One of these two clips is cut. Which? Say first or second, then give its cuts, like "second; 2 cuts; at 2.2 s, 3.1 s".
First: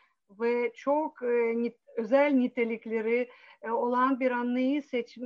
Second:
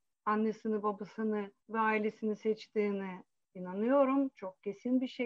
second; 1 cut; at 1.6 s